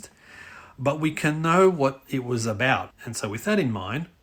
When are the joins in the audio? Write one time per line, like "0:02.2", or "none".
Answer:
0:02.9